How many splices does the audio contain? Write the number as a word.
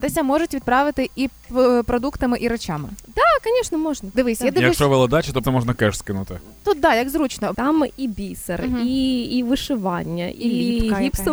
two